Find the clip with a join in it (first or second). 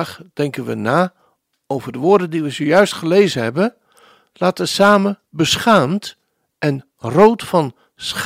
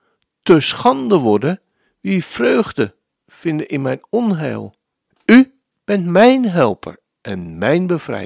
second